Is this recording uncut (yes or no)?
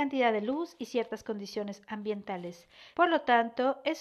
no